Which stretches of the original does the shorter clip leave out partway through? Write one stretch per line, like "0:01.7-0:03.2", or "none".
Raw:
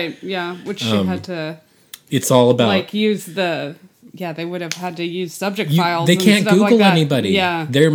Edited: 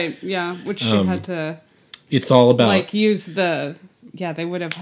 none